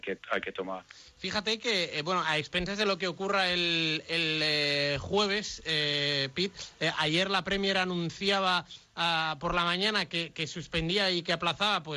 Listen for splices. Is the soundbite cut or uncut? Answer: uncut